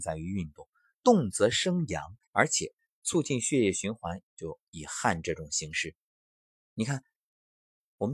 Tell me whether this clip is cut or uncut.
cut